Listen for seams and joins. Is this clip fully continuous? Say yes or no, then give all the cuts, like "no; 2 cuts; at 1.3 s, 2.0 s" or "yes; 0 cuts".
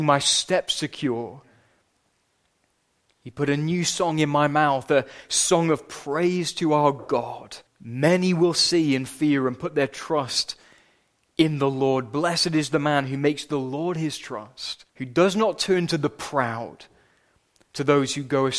no; 2 cuts; at 7.7 s, 14.9 s